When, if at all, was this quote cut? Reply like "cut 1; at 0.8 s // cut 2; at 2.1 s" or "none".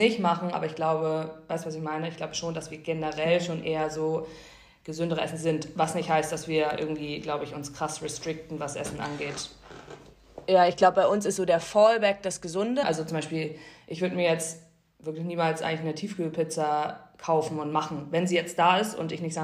cut 1; at 12.8 s

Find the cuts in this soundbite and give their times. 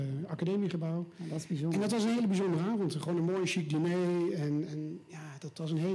cut 1; at 4.7 s

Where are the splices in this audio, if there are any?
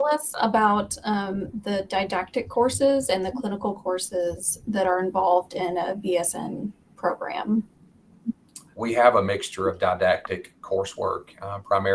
cut 1; at 8.7 s

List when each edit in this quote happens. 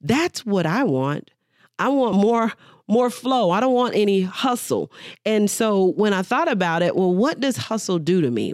none

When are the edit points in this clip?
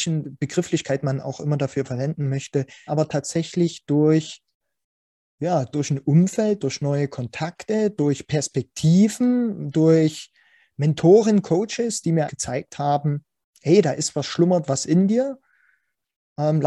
cut 1; at 2.9 s // cut 2; at 12.3 s

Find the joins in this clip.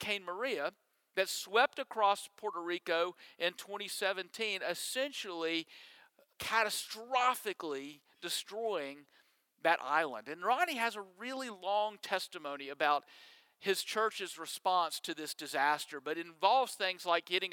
cut 1; at 6.3 s

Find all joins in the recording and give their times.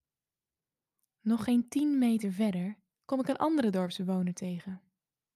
cut 1; at 2.9 s

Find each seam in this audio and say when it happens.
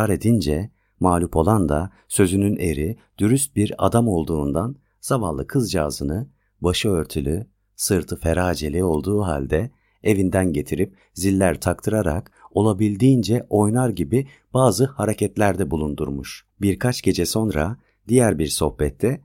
cut 1; at 16.5 s

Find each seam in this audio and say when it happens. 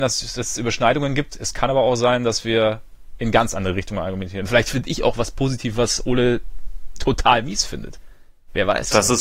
none

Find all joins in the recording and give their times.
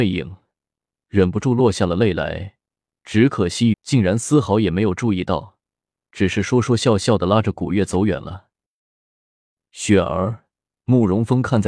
cut 1; at 3.7 s

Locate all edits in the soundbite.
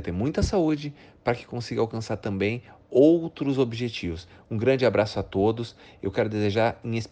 none

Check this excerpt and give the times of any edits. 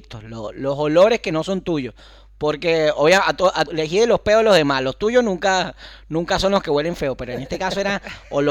cut 1; at 3.7 s

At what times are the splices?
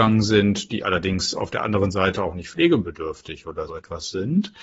cut 1; at 3.7 s

